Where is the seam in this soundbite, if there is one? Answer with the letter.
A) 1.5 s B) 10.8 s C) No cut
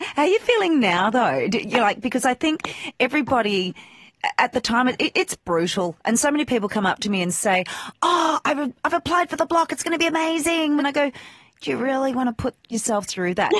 B